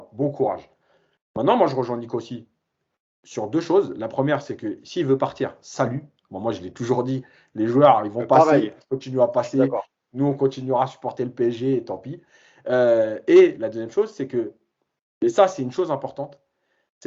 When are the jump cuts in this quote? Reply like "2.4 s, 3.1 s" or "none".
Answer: none

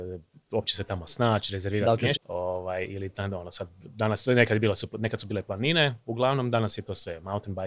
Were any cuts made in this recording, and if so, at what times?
2.1 s

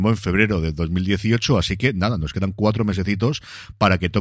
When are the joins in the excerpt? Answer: none

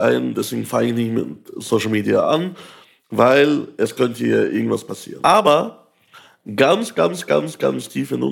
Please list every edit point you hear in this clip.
5.2 s

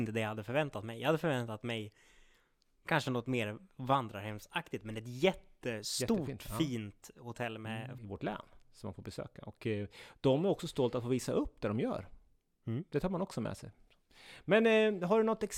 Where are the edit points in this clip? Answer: 8.0 s

